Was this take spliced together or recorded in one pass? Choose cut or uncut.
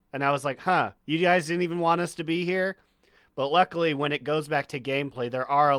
cut